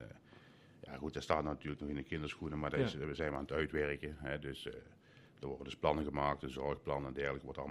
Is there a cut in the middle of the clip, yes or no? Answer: no